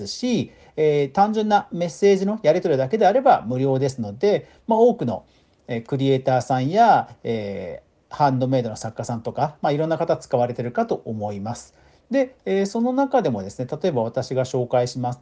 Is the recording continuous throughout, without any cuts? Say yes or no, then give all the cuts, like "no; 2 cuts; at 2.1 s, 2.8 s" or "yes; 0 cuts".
yes; 0 cuts